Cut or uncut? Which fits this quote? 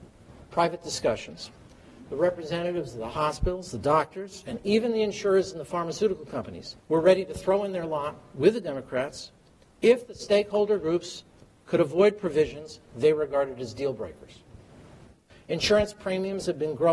cut